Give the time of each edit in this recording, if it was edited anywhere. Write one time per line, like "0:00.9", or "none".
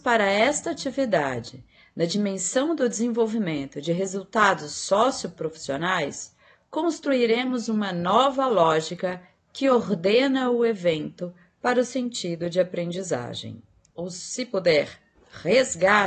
0:13.9